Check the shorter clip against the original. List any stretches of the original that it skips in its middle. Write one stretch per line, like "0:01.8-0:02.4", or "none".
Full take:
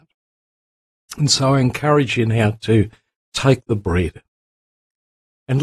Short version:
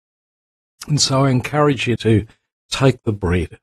0:02.3-0:02.6